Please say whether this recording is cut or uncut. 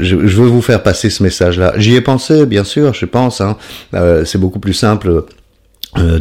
uncut